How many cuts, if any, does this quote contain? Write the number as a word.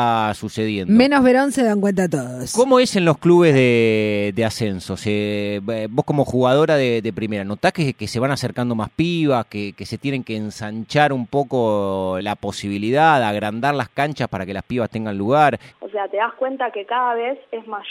two